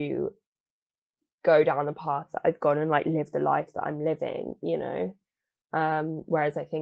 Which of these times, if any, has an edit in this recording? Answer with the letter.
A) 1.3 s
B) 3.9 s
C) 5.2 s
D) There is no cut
D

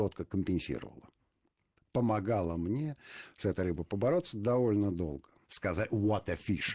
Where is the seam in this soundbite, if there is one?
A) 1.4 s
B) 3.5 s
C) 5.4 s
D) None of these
C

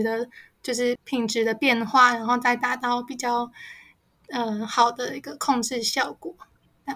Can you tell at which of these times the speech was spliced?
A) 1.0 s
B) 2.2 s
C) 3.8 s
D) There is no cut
A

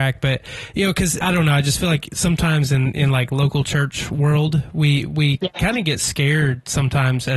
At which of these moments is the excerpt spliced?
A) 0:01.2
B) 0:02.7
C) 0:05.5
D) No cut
A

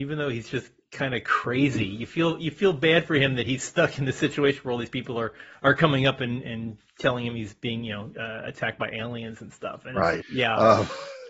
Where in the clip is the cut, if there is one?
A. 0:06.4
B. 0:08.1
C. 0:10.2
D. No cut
C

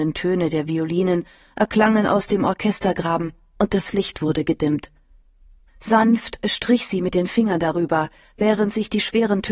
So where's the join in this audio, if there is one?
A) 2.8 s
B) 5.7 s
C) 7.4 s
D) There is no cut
B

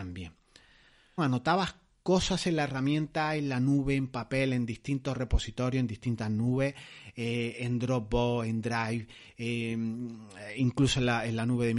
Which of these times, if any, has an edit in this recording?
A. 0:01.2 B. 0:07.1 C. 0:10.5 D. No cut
A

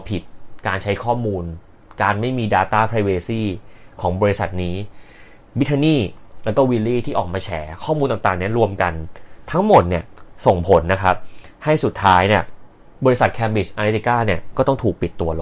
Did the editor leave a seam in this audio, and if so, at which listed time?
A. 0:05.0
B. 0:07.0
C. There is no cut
C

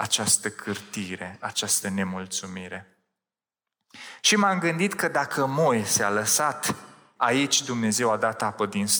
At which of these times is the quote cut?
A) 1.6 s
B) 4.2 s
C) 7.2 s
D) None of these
C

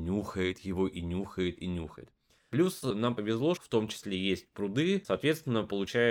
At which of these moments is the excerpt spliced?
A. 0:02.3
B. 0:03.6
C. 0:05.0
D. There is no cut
B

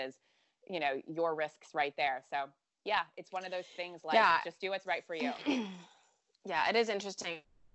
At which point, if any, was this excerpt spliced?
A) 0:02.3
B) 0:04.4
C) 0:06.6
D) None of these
D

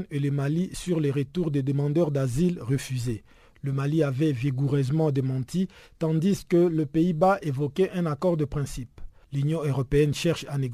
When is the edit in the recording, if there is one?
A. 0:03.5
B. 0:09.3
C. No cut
C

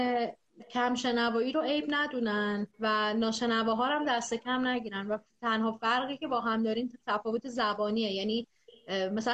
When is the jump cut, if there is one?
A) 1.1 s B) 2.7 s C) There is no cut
B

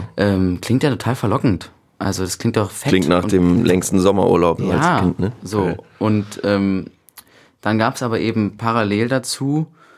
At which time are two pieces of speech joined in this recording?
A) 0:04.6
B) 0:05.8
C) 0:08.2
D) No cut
A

